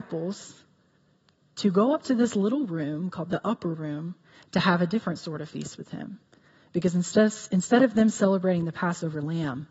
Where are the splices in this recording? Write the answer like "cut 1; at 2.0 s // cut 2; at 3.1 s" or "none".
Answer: none